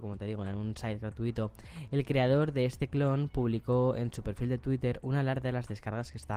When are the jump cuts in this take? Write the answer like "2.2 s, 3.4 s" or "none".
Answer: none

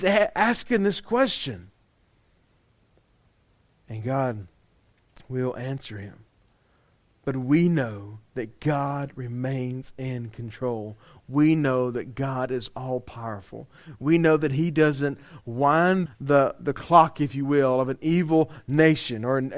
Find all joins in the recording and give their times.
16.1 s

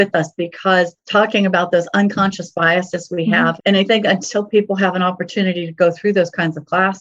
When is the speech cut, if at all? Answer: 3.6 s

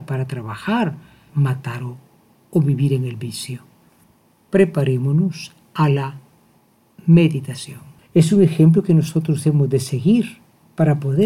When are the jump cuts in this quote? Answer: 1.3 s, 8.0 s

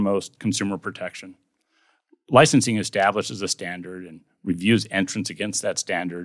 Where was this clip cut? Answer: none

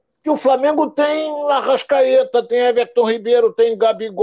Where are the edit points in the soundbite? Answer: none

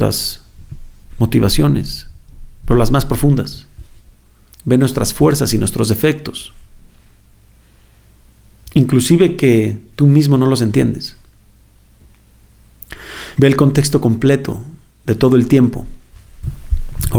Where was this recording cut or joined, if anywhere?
4.5 s, 13.3 s

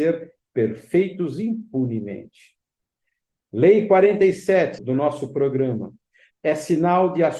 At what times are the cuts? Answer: 4.8 s, 6.3 s

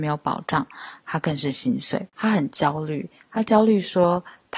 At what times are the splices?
2.1 s

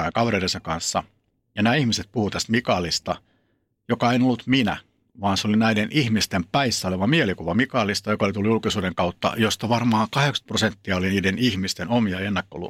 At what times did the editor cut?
none

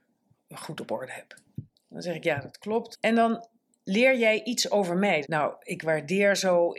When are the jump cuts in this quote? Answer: 2.9 s, 5.2 s

